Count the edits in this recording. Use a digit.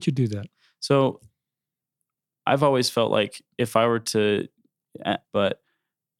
1